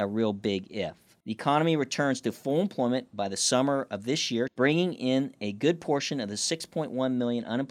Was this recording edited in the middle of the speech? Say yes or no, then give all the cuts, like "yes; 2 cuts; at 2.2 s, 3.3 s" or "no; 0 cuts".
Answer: yes; 2 cuts; at 1.2 s, 4.5 s